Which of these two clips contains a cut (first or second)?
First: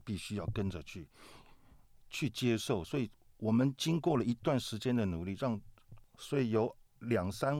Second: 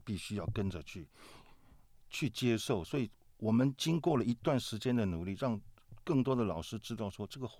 first